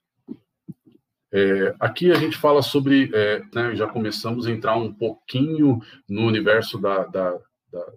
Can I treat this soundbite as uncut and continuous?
no; 1 cut; at 3.5 s

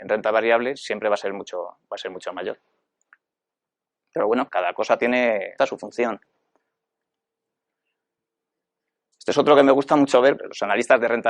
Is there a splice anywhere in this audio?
yes; 3 cuts; at 4.5 s, 5.6 s, 10.4 s

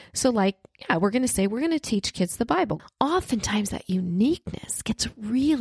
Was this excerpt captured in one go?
no; 1 cut; at 2.8 s

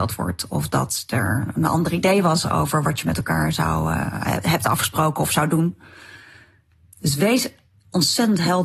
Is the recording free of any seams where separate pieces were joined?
yes; 0 cuts

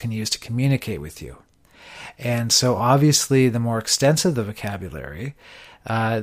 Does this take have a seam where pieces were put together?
no; 0 cuts

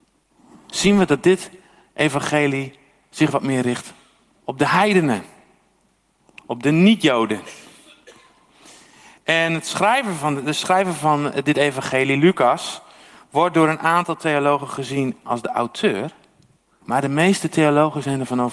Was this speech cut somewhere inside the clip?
yes; 1 cut; at 16.8 s

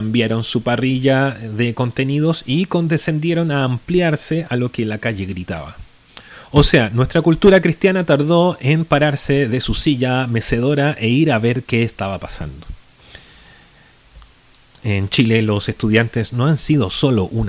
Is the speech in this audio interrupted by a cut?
yes; 1 cut; at 14.8 s

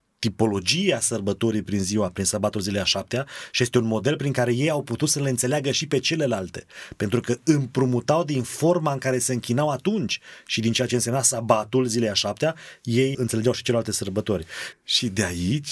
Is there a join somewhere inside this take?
yes; 2 cuts; at 13.1 s, 14.7 s

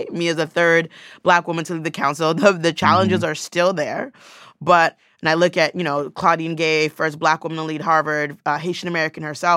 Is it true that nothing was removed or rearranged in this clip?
yes; 0 cuts

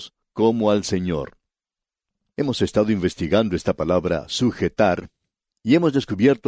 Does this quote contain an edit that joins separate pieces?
no; 0 cuts

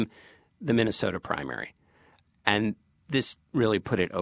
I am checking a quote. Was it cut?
no; 0 cuts

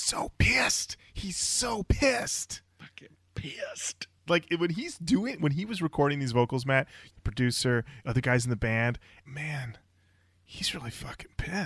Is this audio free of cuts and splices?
no; 3 cuts; at 4.3 s, 7.1 s, 9.3 s

